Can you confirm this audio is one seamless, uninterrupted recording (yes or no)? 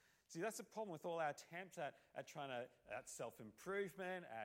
yes